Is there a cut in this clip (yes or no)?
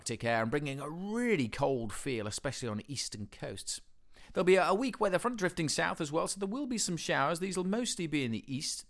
no